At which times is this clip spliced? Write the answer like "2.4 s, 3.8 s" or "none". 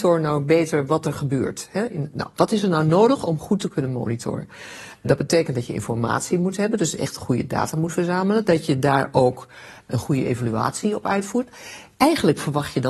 none